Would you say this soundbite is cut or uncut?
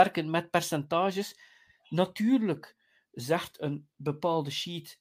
uncut